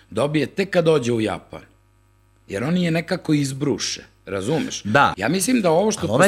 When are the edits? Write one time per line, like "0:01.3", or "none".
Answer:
0:05.1

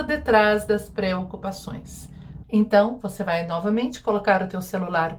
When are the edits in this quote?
0:02.4

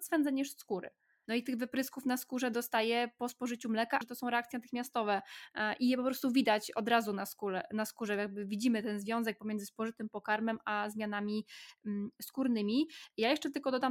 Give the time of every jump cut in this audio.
0:01.2
0:04.0

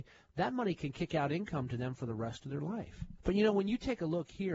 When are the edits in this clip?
0:03.2

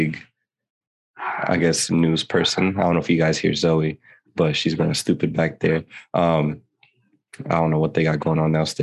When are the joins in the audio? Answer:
none

